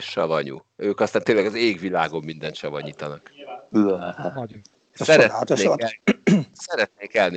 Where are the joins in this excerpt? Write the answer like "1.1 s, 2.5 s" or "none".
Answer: 4.7 s